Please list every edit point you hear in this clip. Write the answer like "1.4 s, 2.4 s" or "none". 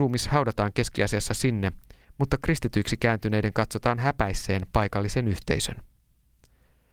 2.0 s